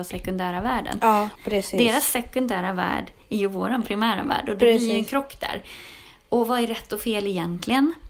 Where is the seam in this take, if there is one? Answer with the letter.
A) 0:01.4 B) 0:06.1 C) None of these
A